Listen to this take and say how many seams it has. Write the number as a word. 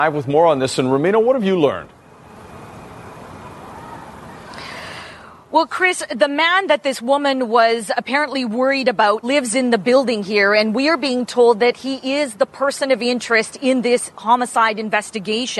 one